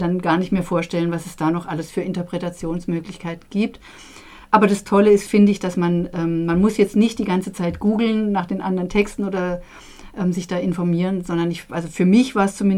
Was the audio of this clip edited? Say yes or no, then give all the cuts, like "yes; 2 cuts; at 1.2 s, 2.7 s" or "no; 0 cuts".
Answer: no; 0 cuts